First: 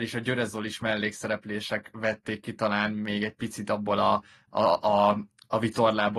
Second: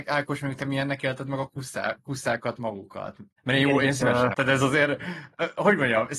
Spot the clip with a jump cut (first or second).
second